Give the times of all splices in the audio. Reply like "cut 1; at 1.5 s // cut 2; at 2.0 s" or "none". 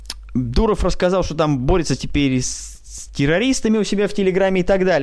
none